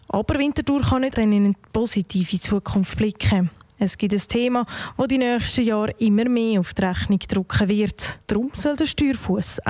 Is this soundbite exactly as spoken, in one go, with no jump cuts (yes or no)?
no